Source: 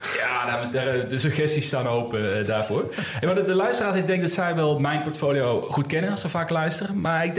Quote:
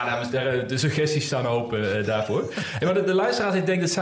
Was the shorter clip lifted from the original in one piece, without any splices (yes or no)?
yes